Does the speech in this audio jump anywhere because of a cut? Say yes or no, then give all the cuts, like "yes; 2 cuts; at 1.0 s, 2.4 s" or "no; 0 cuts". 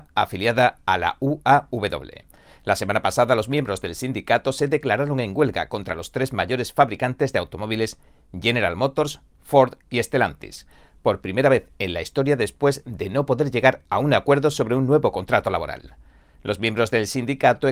no; 0 cuts